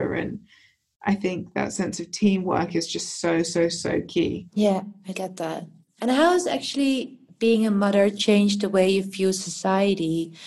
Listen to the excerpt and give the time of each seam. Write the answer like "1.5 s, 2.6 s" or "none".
none